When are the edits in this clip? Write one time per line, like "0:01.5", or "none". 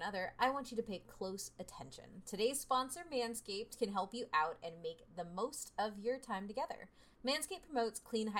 none